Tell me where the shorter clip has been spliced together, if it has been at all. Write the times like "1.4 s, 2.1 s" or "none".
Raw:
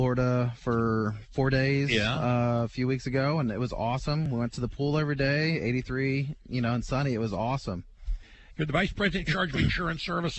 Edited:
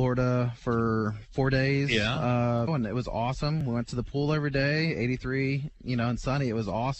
2.7 s